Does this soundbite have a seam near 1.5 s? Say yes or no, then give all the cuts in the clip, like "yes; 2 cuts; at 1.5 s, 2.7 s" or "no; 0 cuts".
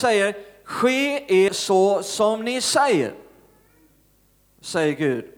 yes; 1 cut; at 1.5 s